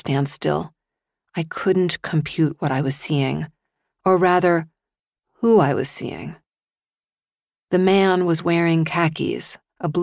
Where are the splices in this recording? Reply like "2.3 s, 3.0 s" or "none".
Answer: none

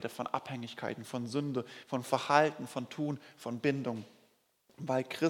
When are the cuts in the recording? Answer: none

